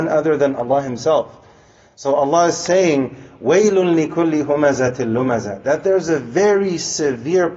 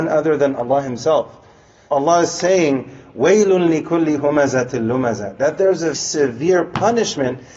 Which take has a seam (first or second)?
second